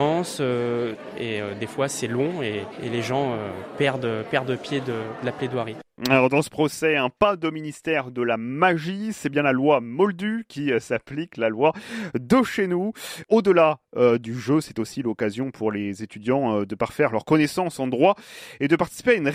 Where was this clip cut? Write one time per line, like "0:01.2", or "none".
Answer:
0:13.2